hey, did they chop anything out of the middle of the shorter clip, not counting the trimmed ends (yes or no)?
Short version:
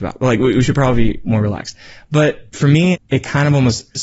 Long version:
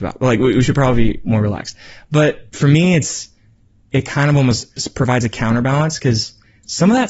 yes